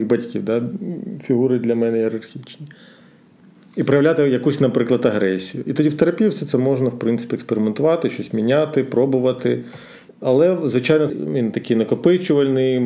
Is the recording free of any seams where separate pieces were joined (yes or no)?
no